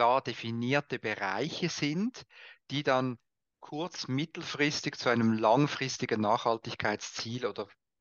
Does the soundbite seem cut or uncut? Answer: uncut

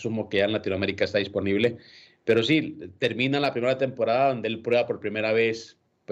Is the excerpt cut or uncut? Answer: uncut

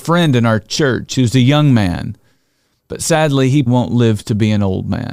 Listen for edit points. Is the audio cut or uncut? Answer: cut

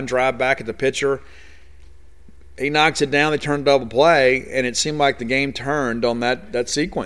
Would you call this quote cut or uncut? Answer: uncut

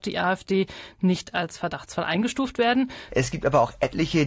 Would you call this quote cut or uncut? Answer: cut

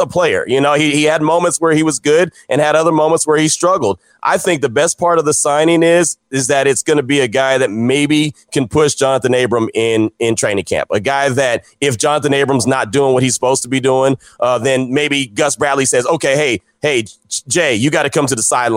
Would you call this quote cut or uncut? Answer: uncut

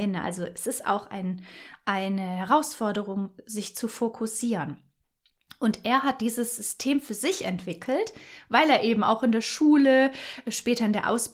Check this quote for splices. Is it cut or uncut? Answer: uncut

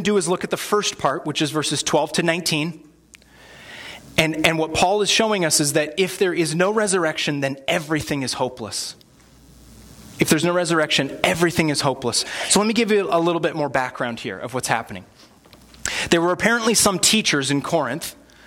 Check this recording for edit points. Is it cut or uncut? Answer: uncut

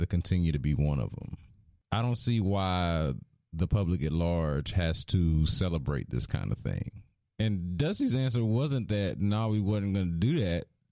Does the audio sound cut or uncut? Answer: cut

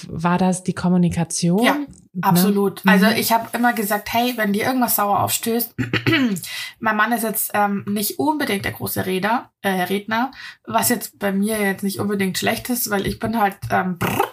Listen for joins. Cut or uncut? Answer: uncut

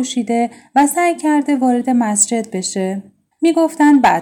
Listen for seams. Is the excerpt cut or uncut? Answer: cut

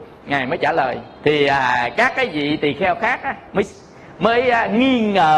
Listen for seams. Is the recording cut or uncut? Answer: cut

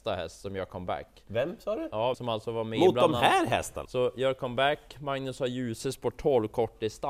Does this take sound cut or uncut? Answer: cut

